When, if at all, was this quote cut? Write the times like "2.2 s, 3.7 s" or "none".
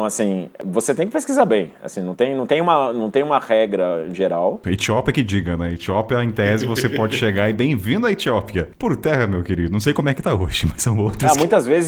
4.6 s